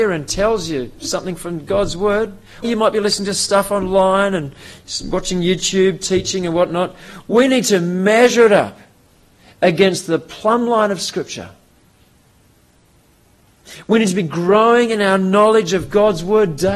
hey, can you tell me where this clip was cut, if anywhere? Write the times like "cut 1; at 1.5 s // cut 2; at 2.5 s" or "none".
cut 1; at 2.6 s